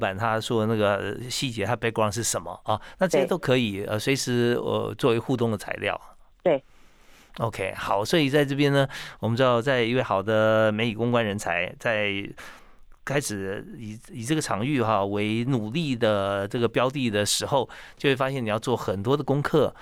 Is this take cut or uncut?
uncut